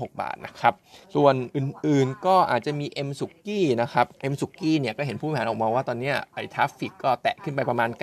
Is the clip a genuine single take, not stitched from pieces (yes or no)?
no